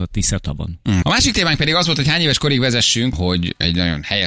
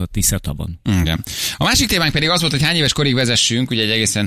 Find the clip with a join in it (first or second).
first